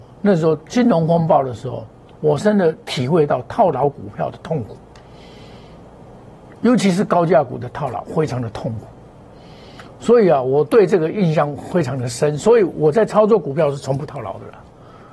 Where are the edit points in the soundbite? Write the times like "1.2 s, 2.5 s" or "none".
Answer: 2.4 s